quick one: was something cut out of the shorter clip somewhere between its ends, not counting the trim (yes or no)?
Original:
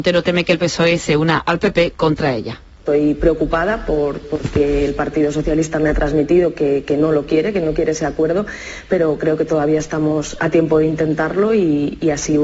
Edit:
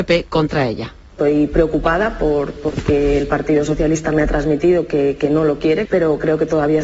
yes